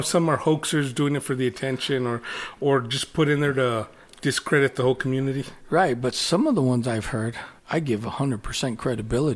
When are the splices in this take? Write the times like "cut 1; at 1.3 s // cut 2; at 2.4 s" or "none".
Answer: cut 1; at 7.6 s